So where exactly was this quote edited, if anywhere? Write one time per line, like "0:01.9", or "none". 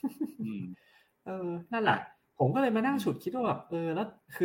none